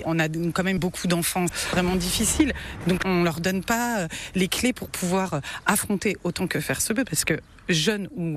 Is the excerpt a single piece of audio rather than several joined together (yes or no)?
yes